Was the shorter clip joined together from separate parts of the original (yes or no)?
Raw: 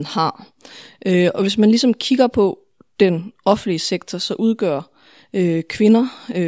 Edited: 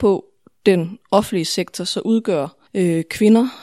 yes